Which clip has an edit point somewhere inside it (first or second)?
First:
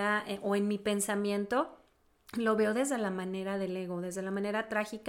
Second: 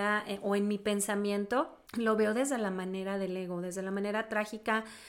second